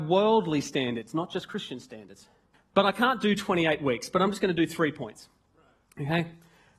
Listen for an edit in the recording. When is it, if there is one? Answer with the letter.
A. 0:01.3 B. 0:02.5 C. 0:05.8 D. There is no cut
B